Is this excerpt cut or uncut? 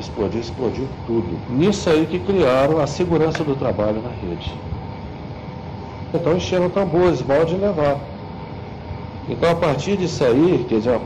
cut